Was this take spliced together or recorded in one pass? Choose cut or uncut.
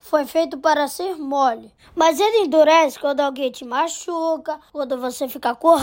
uncut